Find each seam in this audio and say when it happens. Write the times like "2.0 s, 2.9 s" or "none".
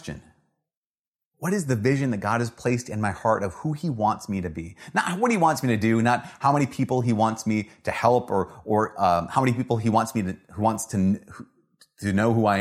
none